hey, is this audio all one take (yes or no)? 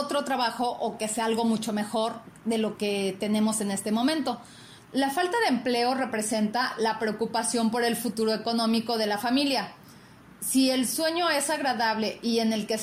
no